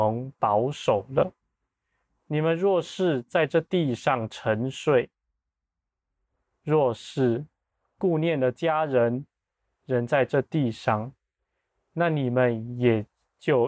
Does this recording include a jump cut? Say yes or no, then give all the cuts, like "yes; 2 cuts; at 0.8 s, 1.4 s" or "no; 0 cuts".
no; 0 cuts